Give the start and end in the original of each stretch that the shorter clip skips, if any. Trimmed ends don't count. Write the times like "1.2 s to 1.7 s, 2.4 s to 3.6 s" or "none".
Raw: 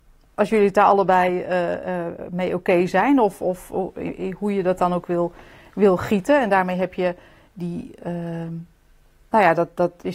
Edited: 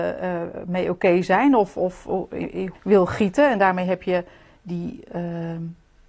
4.4 s to 5.6 s